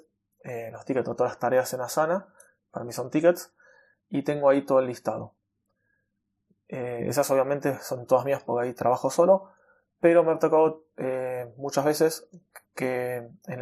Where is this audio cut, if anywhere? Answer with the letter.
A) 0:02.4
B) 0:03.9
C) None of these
B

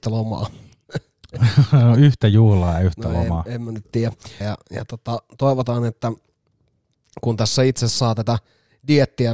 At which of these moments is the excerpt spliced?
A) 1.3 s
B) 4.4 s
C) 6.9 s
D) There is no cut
B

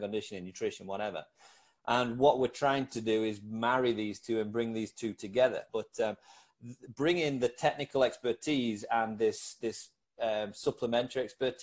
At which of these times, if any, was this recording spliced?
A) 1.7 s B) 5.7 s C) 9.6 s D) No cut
B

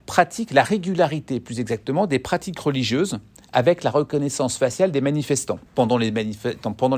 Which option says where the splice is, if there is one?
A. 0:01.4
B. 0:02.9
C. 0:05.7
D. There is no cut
C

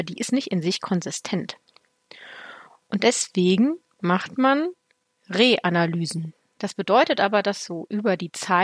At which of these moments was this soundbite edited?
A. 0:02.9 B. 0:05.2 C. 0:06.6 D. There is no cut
C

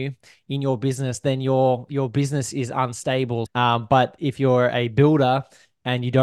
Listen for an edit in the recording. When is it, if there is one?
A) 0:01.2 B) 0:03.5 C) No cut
B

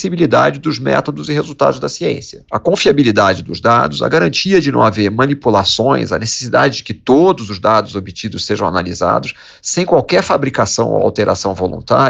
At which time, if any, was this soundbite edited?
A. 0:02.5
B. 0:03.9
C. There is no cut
A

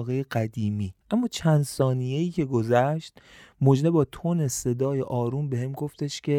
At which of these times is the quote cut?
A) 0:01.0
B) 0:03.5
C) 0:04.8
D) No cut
A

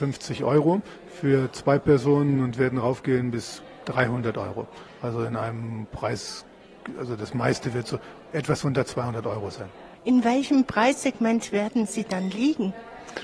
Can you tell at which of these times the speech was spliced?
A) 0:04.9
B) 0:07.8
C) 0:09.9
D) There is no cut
C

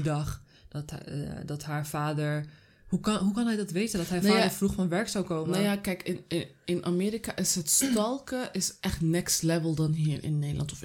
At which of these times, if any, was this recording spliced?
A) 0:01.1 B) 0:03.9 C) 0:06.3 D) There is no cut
D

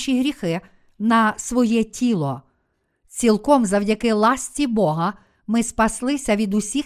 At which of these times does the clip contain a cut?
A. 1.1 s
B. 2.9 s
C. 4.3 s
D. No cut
B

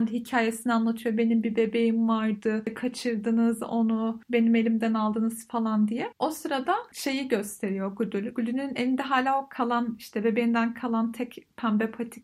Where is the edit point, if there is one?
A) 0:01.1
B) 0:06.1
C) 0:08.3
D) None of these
D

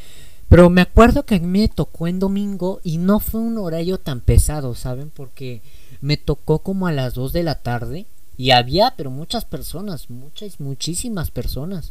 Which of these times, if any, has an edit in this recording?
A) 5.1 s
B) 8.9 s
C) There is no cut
C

